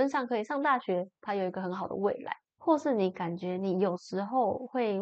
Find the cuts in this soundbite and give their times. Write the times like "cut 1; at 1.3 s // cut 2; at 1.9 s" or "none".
cut 1; at 1.2 s // cut 2; at 2.4 s